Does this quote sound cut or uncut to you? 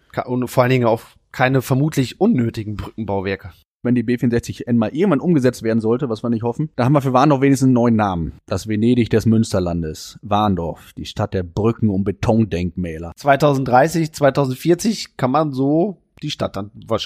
uncut